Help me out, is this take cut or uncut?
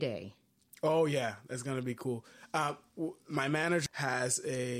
cut